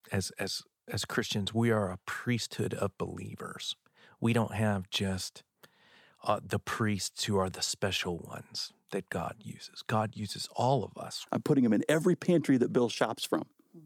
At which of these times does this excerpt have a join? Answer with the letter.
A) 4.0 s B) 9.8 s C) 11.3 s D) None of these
C